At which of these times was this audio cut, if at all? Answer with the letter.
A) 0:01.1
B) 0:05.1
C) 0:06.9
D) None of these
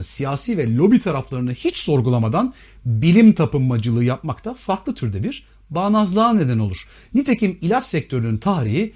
D